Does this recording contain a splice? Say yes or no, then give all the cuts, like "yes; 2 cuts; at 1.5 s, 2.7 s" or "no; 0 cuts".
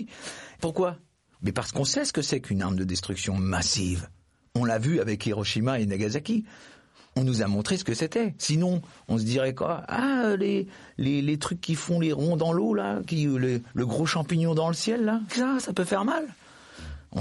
yes; 1 cut; at 15.3 s